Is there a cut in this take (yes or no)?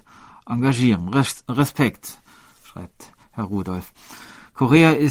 no